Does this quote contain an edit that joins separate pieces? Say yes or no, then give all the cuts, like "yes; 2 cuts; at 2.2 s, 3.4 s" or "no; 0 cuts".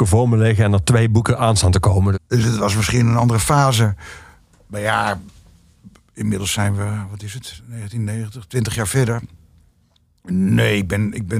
yes; 1 cut; at 2.1 s